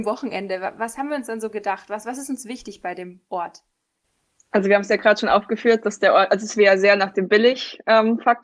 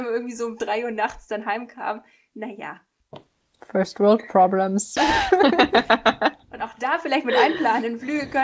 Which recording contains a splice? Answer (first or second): second